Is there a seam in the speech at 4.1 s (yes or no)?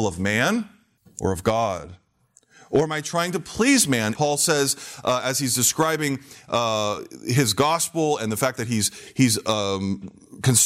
yes